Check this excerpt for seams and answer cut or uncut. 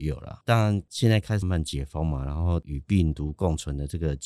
cut